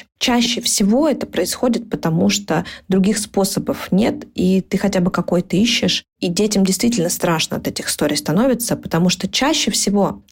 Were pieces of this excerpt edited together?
no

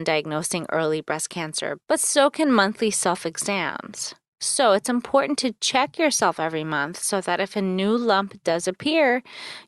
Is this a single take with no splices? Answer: yes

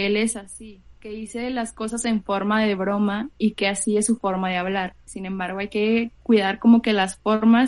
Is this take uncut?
no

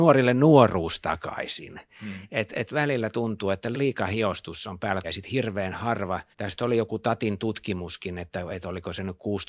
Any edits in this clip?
yes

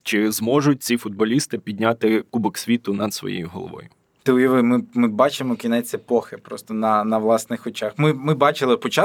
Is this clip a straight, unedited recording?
yes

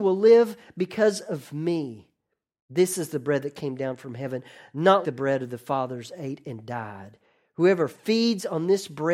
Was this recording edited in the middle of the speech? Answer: yes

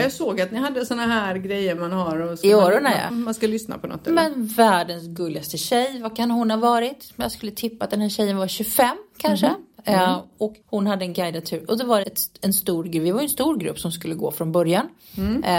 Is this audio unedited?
no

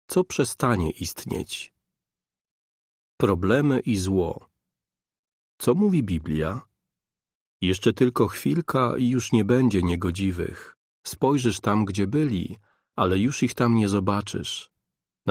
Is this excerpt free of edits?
yes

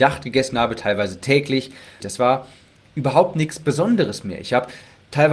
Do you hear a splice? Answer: yes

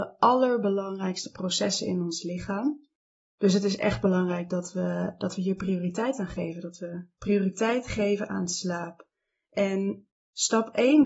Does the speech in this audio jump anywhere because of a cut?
no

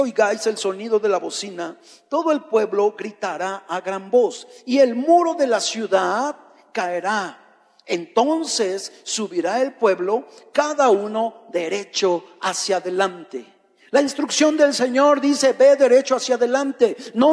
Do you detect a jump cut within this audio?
no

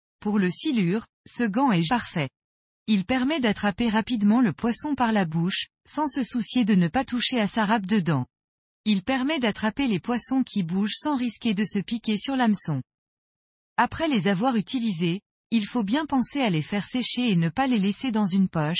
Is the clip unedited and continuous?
no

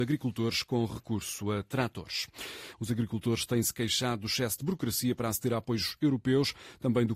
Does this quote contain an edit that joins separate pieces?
yes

